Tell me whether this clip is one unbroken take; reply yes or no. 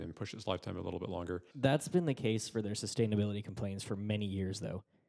no